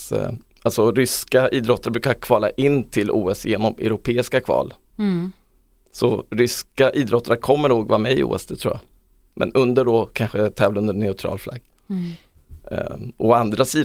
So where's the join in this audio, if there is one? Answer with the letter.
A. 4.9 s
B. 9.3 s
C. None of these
A